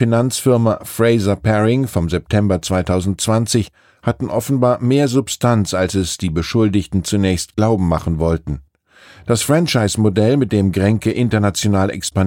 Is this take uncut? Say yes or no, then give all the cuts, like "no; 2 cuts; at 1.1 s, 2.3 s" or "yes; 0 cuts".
yes; 0 cuts